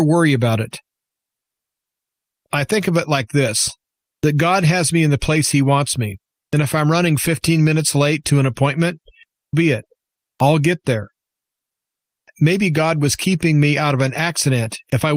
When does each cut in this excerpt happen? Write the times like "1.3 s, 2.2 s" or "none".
9.5 s